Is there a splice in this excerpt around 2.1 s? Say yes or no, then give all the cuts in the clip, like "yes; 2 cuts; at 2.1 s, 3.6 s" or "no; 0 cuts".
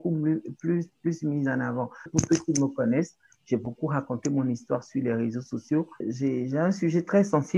yes; 2 cuts; at 2.1 s, 6.0 s